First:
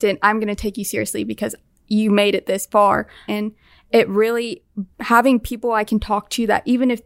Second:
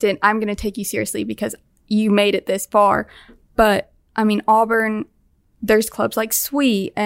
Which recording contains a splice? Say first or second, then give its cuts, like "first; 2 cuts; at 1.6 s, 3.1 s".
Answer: first; 2 cuts; at 3.3 s, 4.9 s